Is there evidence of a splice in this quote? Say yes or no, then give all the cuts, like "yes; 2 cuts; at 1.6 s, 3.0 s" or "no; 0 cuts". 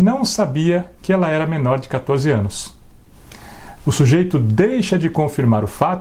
yes; 1 cut; at 3.8 s